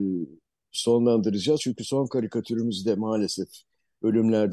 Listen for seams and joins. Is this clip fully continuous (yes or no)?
yes